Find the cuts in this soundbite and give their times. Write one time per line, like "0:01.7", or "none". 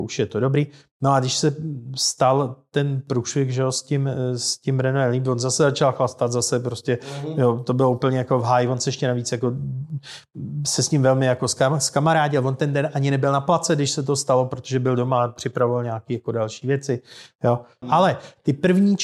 0:17.8